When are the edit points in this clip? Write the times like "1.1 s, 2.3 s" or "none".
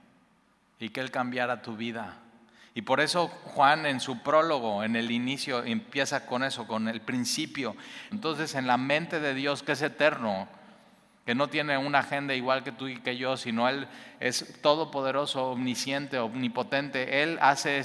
8.1 s